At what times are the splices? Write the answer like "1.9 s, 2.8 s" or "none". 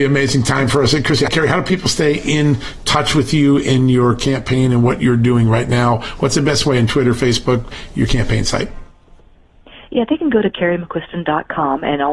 1.3 s

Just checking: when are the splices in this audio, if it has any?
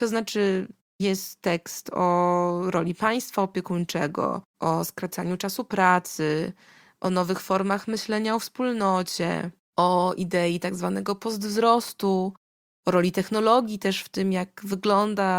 4.5 s

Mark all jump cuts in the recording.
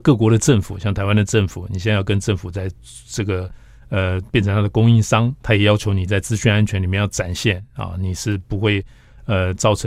none

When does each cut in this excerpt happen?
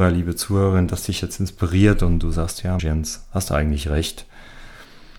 2.8 s

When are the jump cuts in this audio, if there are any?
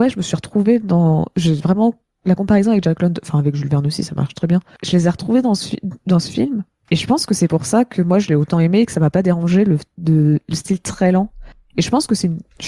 none

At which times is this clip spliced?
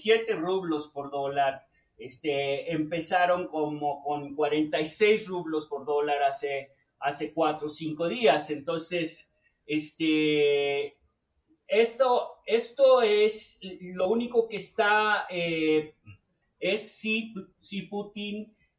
16.4 s

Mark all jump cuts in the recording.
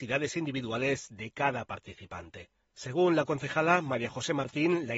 2.6 s

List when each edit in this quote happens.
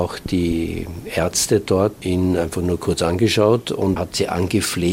4.0 s

